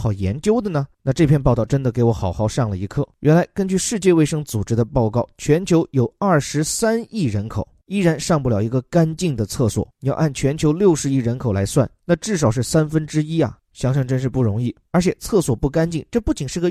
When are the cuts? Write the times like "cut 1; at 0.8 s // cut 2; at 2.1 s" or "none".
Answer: none